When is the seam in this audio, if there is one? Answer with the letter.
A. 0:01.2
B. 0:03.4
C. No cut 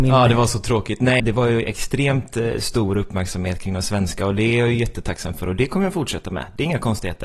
A